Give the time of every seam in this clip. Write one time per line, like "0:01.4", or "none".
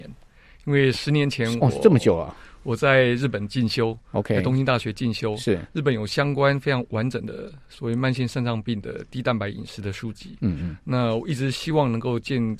none